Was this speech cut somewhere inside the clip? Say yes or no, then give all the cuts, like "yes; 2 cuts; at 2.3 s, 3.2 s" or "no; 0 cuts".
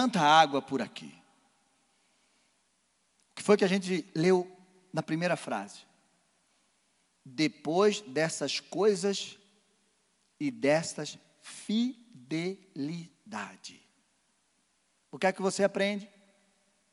no; 0 cuts